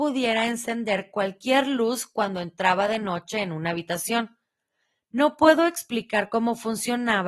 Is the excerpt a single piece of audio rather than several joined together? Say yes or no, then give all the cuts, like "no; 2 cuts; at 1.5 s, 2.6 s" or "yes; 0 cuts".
yes; 0 cuts